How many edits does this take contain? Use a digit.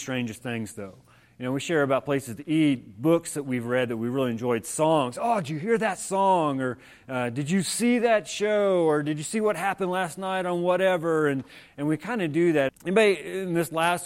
1